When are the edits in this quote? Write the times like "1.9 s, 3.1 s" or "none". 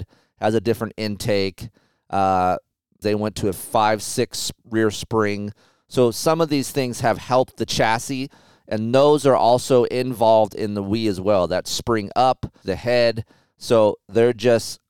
3.0 s, 12.6 s